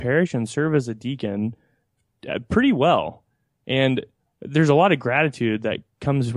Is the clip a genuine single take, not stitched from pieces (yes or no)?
yes